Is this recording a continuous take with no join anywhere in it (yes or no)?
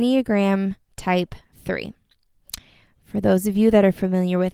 yes